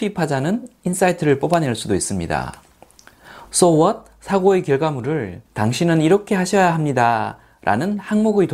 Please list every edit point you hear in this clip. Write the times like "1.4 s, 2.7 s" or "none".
3.4 s, 5.5 s

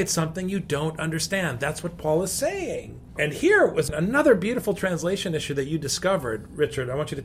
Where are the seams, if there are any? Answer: none

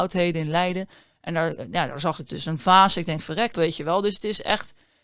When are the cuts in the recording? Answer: 3.5 s

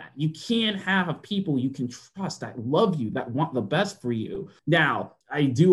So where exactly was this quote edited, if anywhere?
3.1 s

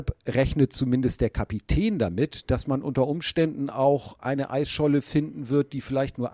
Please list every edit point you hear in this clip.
none

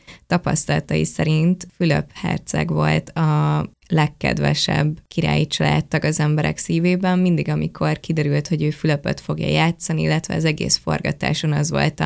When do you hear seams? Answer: none

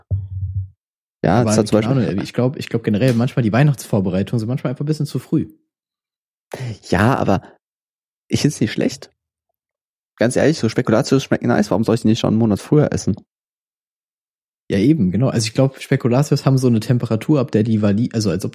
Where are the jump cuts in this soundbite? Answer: none

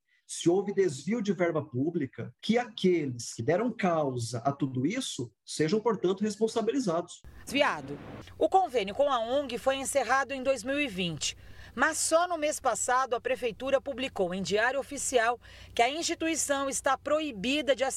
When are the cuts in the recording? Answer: 2.4 s, 7.5 s

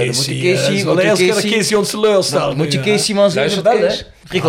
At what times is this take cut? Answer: none

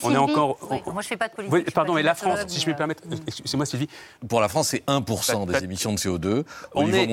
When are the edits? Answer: 4.1 s

